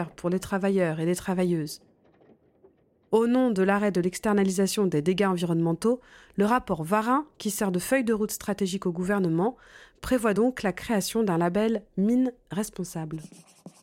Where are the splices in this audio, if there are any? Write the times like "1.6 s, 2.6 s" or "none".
none